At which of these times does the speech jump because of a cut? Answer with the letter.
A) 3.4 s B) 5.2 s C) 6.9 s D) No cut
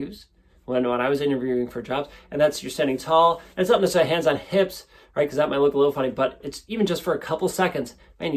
D